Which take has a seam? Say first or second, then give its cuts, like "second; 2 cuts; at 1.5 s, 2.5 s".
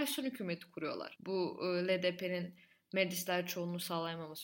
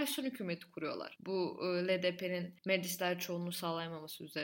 second; 1 cut; at 2.6 s